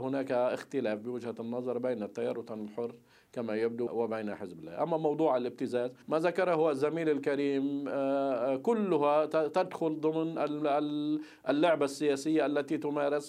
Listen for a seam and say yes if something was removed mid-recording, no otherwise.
yes